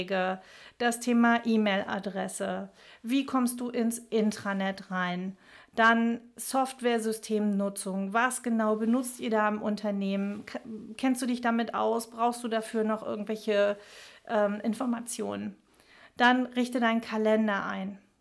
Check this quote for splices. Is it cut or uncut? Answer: uncut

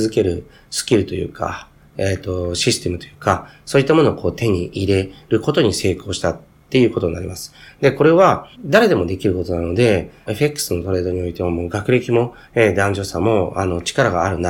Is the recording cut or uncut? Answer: cut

